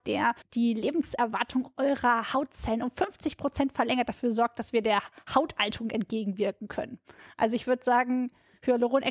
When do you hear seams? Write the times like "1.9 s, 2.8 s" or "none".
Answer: none